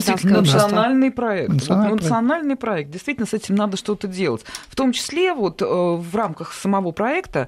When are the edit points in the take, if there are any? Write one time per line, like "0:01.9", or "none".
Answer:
none